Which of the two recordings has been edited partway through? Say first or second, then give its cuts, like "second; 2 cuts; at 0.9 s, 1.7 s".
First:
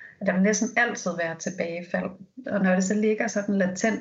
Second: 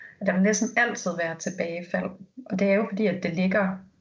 first; 1 cut; at 2.4 s